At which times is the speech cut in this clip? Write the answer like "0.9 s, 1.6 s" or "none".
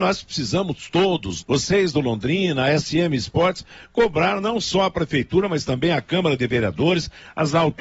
1.4 s